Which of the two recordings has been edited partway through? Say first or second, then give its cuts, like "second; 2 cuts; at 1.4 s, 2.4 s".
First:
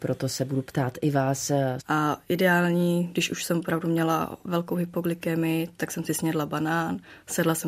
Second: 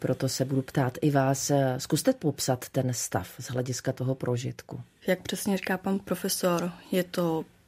first; 1 cut; at 1.8 s